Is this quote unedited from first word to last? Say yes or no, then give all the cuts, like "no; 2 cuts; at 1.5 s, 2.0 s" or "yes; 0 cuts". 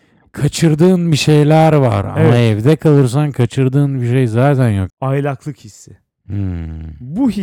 no; 1 cut; at 4.9 s